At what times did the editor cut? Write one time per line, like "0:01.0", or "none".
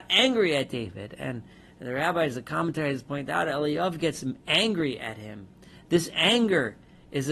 none